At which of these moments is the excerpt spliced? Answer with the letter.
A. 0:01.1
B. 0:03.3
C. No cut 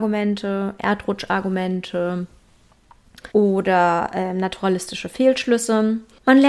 B